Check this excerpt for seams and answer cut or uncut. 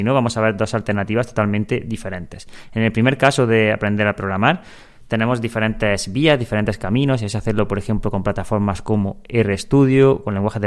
uncut